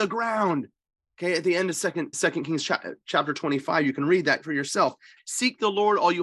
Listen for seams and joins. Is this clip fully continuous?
no; 2 cuts; at 2.1 s, 5.2 s

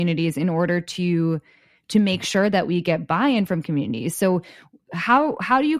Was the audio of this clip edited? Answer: no; 0 cuts

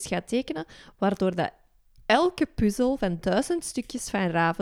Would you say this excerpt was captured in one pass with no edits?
yes; 0 cuts

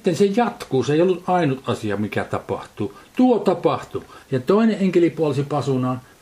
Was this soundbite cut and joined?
yes; 1 cut; at 4.2 s

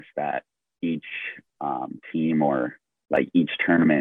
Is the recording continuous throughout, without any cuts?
yes; 0 cuts

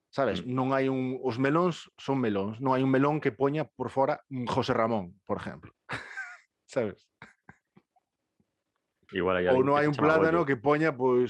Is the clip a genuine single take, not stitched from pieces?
no; 1 cut; at 9.1 s

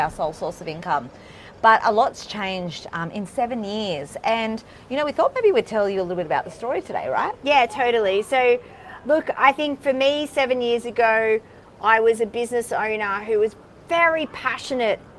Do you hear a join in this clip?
no; 0 cuts

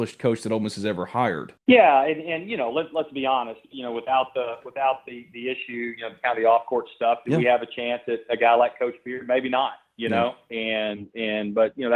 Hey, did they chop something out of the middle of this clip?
yes; 1 cut; at 1.6 s

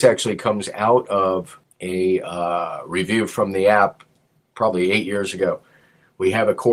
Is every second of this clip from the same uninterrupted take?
yes; 0 cuts

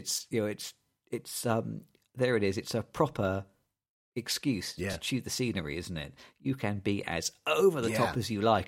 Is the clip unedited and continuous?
yes; 0 cuts

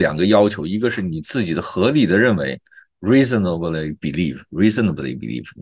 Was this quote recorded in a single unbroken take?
yes; 0 cuts

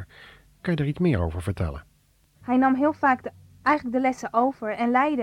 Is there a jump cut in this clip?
yes; 1 cut; at 2.4 s

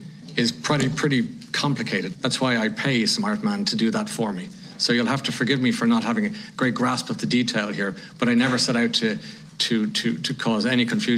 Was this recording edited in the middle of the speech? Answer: yes; 1 cut; at 2.1 s

